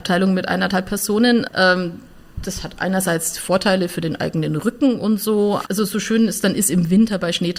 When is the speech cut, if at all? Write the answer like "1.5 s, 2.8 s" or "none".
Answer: 1.5 s, 5.6 s